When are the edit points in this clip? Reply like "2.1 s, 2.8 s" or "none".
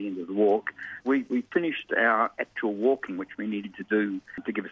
1.0 s